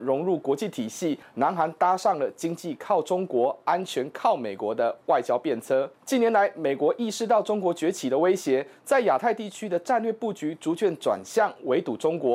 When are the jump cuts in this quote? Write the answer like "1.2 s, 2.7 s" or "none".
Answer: none